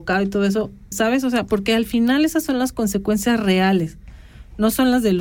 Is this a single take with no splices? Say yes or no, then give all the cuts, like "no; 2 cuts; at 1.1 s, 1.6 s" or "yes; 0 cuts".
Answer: no; 1 cut; at 0.9 s